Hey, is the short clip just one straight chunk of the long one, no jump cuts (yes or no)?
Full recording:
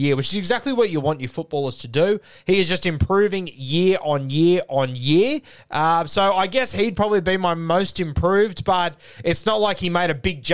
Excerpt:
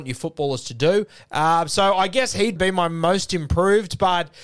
no